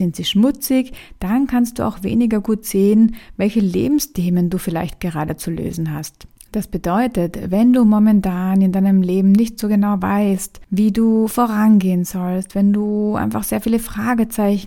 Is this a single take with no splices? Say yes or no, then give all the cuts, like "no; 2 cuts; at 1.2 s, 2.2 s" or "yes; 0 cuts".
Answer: yes; 0 cuts